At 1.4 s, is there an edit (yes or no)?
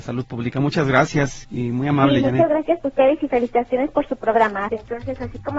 yes